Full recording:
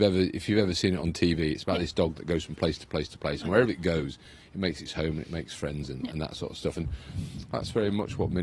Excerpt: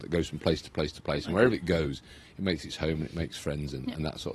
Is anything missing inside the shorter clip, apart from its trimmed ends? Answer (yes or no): no